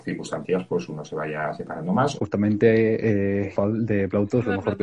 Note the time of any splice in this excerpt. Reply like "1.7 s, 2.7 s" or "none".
2.2 s, 3.5 s